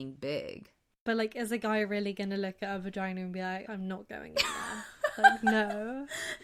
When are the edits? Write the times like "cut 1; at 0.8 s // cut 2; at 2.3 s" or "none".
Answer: cut 1; at 3.7 s